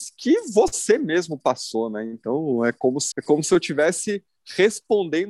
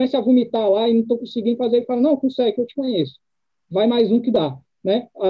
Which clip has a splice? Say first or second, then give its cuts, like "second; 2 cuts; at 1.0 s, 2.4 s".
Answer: first; 1 cut; at 3.1 s